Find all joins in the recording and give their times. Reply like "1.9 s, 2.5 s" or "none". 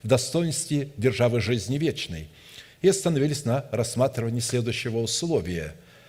none